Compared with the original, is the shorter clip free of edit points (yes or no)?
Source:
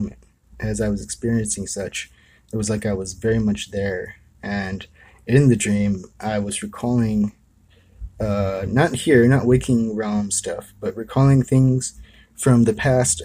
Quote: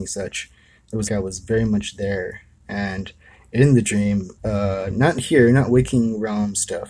no